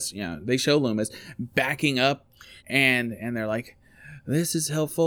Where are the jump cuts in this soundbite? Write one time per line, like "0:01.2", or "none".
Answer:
0:02.6